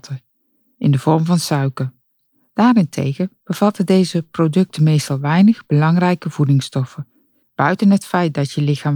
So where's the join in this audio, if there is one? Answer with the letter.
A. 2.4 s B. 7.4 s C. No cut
B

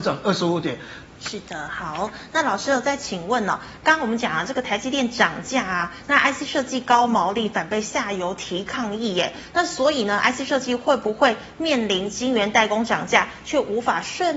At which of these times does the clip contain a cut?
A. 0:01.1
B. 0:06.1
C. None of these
A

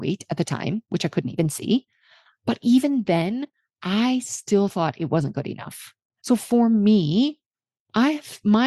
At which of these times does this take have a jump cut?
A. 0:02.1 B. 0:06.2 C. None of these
B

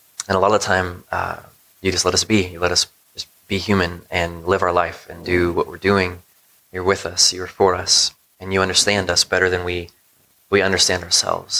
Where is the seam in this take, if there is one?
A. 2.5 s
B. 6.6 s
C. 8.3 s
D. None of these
B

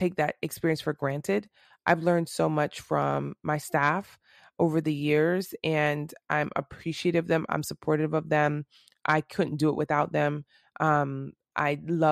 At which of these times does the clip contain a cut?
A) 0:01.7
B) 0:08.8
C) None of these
C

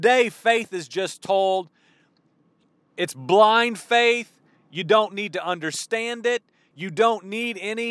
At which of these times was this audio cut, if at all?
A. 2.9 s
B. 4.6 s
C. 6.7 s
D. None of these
C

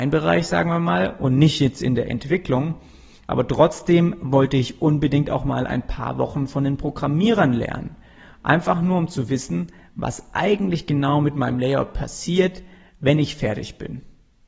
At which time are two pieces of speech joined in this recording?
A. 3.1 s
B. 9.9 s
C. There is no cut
C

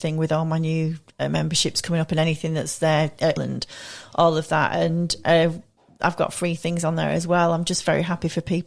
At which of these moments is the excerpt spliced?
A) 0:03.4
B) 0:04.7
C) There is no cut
A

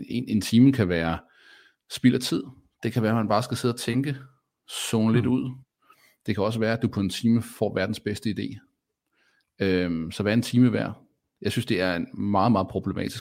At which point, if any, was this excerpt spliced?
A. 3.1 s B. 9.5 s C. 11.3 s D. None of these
D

